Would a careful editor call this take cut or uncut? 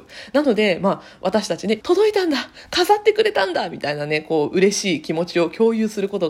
cut